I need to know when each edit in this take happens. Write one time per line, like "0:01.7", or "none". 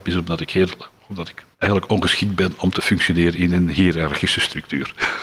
0:01.5